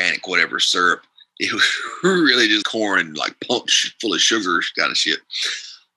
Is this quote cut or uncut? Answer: cut